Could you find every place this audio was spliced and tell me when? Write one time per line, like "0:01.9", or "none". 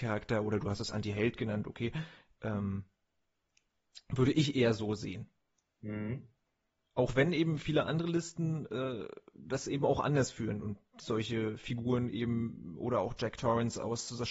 none